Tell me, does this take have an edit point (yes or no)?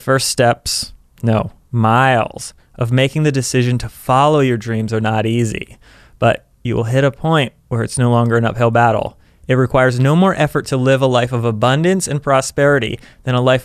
no